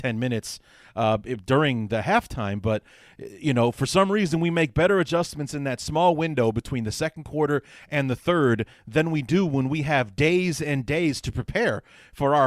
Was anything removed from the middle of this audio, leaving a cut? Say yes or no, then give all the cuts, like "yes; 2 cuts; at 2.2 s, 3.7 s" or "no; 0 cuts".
no; 0 cuts